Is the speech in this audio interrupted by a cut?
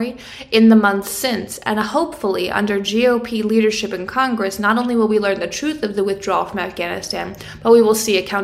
no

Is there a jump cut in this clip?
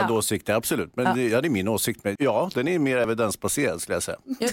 yes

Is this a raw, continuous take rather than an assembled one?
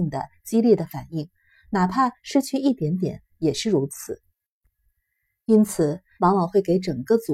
no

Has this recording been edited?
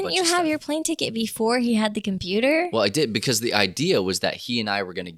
no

